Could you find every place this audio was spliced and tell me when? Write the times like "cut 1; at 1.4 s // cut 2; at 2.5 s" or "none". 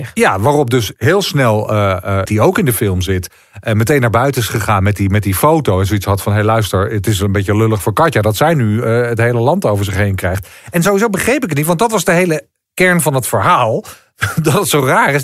cut 1; at 2.3 s